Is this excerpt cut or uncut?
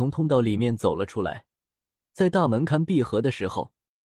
cut